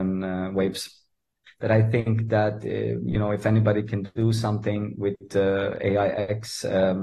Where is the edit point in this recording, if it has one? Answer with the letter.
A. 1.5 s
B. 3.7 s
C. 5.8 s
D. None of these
A